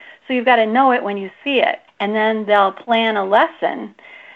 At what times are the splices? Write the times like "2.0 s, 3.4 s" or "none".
1.9 s